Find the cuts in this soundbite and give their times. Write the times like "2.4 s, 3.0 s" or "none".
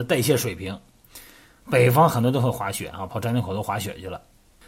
1.6 s